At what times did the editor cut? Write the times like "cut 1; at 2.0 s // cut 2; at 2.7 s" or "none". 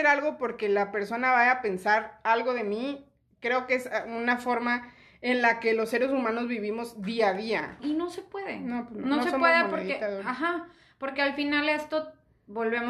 cut 1; at 7.8 s

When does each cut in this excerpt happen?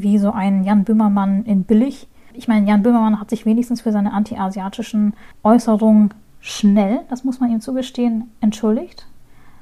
none

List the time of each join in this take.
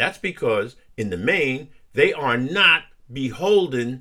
none

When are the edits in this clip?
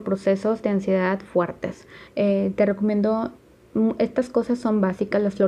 cut 1; at 2.1 s

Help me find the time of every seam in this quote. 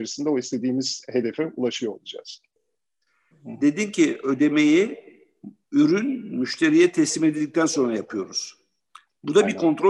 cut 1; at 3.3 s

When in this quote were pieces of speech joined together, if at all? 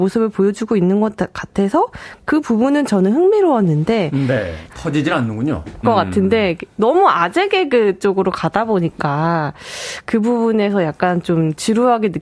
cut 1; at 4.7 s // cut 2; at 5.8 s

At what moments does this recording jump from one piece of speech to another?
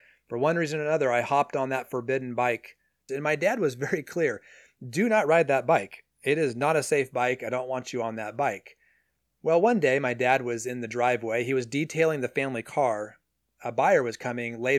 cut 1; at 3.1 s

